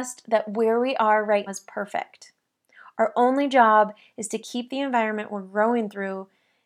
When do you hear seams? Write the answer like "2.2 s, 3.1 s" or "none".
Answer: 1.5 s